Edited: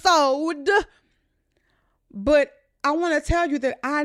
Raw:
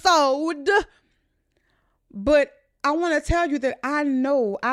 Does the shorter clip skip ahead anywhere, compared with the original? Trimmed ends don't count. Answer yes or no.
no